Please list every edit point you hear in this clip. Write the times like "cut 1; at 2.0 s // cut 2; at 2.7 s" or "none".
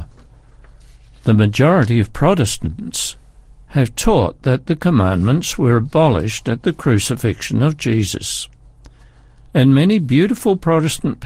none